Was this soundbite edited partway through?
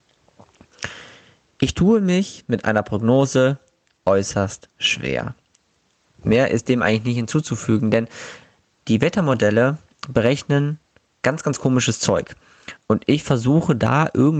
no; 0 cuts

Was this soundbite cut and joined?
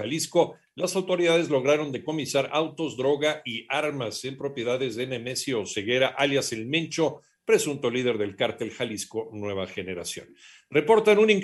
no; 0 cuts

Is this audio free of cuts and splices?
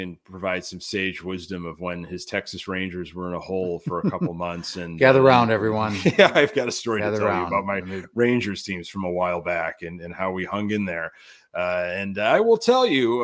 yes; 0 cuts

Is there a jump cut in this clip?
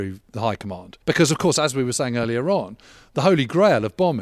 yes; 1 cut; at 1.0 s

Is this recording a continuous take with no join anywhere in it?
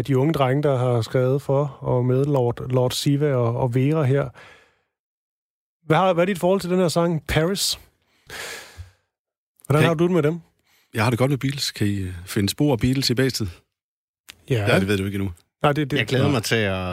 no; 1 cut; at 8.3 s

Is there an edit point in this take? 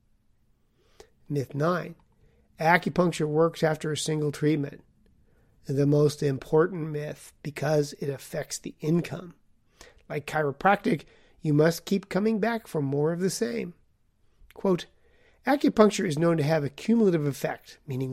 no; 0 cuts

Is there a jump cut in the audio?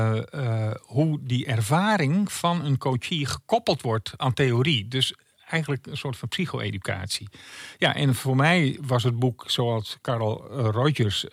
no; 0 cuts

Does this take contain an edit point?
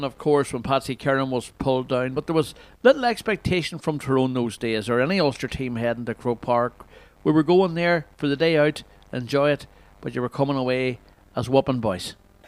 no; 0 cuts

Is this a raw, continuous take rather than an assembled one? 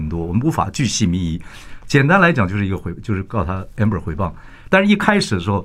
yes; 0 cuts

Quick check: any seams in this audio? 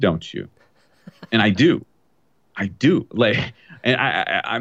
no; 0 cuts

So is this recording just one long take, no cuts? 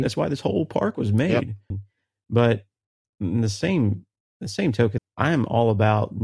no; 2 cuts; at 1.7 s, 5.0 s

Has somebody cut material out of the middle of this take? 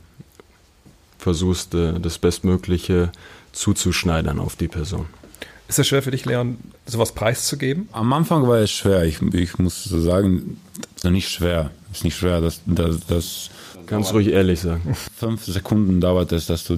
yes; 1 cut; at 11.0 s

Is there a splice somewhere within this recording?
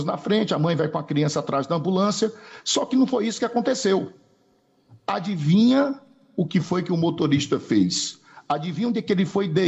no; 0 cuts

